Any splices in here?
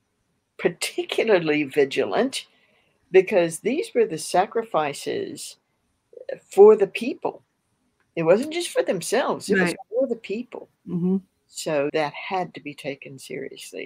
yes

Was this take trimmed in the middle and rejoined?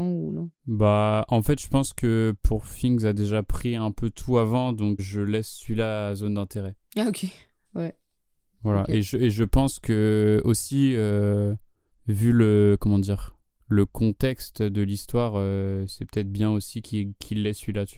yes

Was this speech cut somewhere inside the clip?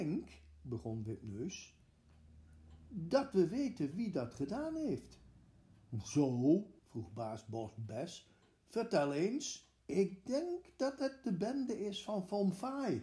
yes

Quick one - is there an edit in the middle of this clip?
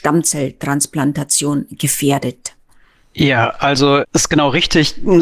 no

